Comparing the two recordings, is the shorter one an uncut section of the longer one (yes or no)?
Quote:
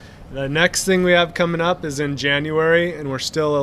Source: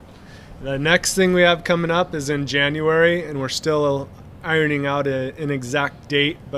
yes